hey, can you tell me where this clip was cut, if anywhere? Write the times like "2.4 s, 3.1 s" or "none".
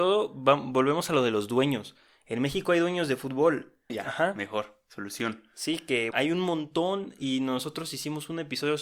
3.9 s, 6.1 s